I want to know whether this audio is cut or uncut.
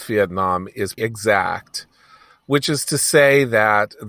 cut